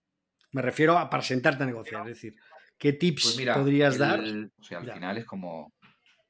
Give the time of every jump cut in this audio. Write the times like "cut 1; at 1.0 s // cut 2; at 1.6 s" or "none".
cut 1; at 4.6 s